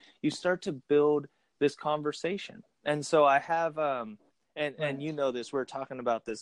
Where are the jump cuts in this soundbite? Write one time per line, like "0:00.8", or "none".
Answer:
none